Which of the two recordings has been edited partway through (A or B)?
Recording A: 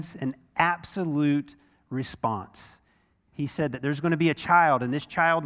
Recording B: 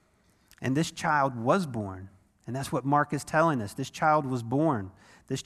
A